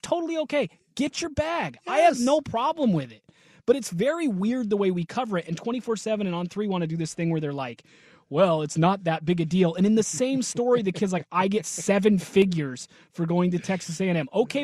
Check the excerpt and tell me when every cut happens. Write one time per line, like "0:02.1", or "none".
none